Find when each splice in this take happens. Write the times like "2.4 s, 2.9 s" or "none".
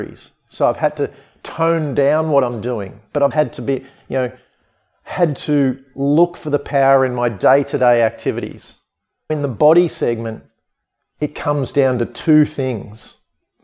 3.3 s, 9.3 s